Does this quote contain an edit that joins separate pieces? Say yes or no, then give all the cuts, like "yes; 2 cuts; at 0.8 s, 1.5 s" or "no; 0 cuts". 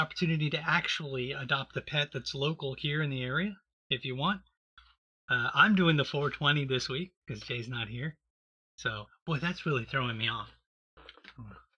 no; 0 cuts